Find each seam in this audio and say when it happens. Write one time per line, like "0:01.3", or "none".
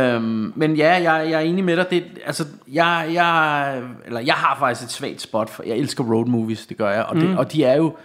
none